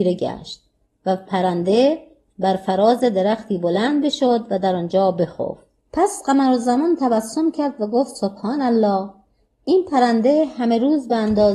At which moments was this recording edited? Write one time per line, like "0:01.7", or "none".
0:05.8